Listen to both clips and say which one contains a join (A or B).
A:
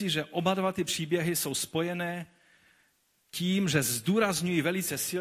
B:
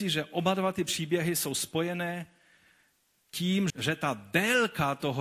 B